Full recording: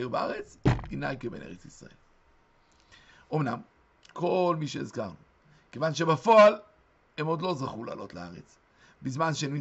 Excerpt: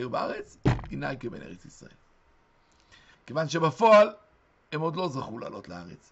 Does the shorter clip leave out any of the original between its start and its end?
yes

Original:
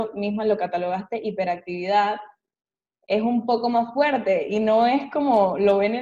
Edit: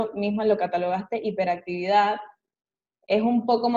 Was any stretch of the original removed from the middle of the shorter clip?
no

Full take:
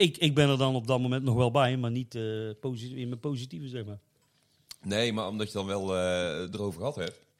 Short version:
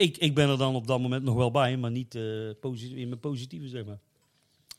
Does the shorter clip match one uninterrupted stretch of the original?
yes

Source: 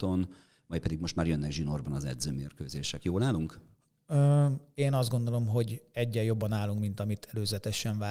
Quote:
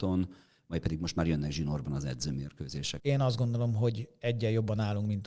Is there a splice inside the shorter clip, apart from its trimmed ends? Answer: yes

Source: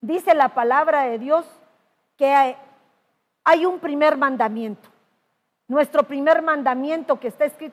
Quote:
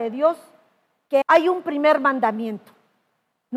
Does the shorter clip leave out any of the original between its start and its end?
yes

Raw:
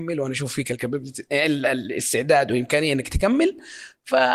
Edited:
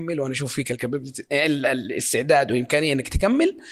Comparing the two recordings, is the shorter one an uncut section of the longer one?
yes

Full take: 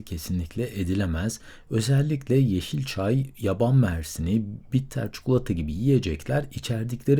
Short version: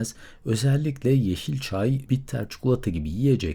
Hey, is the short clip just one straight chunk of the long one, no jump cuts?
no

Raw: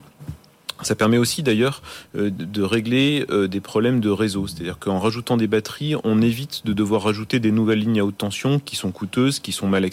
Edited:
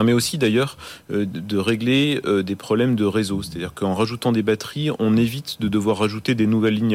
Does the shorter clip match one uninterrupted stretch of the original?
yes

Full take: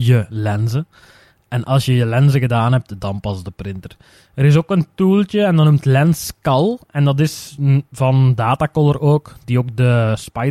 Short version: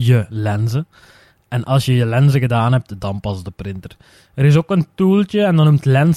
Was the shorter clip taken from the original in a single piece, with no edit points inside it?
yes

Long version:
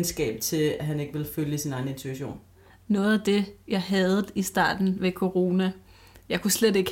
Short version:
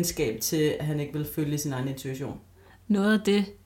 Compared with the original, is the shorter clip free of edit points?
yes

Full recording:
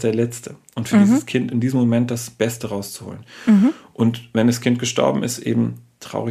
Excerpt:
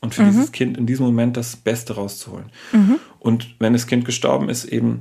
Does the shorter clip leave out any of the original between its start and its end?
no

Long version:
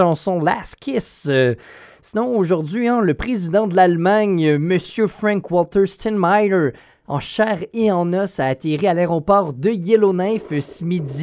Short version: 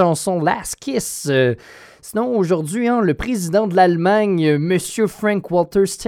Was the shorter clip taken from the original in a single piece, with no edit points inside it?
yes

